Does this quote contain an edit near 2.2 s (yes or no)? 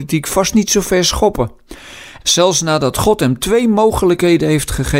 yes